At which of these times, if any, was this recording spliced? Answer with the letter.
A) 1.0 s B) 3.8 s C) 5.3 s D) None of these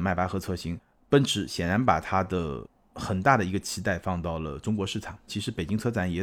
C